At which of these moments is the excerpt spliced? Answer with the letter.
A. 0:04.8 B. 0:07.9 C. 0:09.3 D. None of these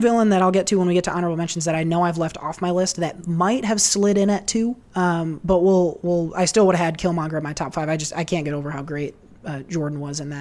A